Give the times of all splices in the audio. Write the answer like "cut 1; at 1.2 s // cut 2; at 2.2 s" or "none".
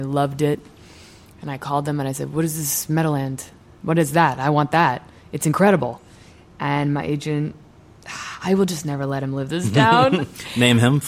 none